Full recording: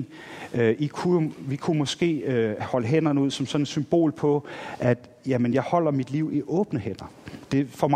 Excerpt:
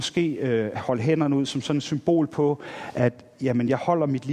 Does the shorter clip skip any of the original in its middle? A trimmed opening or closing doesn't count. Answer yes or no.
no